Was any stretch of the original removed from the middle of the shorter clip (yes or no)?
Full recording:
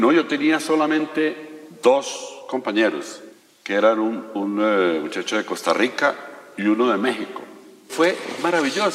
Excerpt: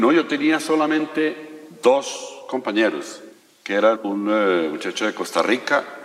yes